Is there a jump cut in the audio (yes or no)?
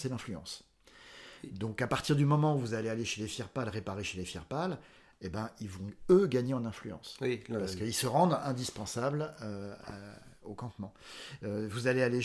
no